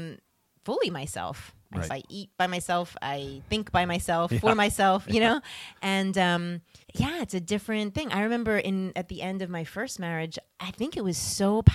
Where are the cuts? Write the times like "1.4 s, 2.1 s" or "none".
1.9 s, 6.8 s, 10.6 s